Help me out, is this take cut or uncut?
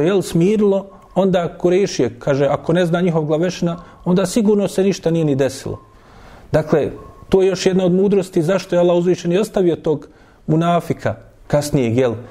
uncut